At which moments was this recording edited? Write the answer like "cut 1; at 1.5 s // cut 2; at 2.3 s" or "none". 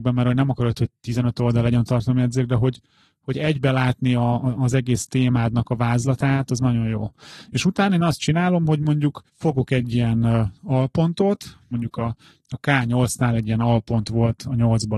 cut 1; at 9.3 s // cut 2; at 11.7 s